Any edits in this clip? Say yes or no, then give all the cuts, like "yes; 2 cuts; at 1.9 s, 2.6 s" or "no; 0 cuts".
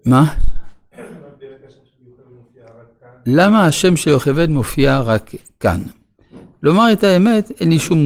no; 0 cuts